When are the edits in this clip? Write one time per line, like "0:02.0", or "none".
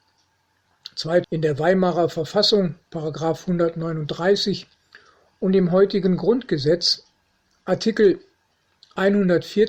0:01.2